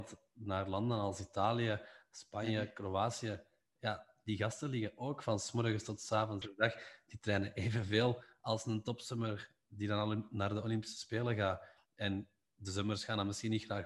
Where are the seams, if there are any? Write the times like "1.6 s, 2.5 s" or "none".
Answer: 6.4 s